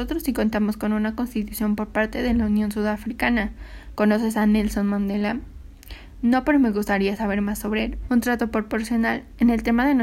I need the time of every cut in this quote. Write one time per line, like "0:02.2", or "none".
0:04.0
0:08.1